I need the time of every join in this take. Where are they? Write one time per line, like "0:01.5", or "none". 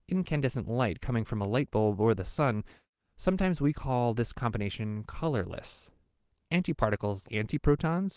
0:07.2